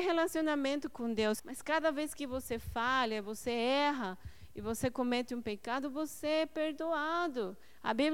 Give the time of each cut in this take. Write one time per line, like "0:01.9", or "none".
0:01.4